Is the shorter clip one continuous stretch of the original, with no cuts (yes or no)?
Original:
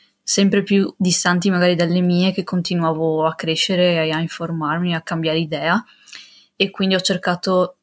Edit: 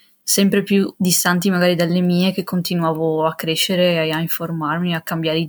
yes